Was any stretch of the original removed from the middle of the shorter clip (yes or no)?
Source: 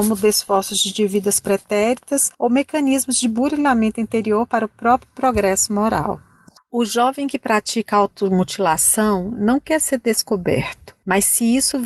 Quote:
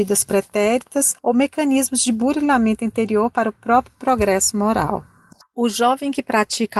no